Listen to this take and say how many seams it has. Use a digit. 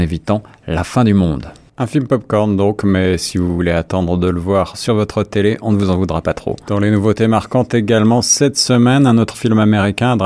1